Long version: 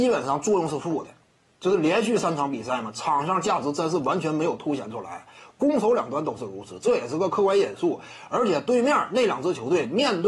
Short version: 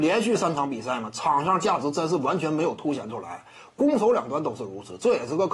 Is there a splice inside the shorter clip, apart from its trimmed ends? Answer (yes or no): no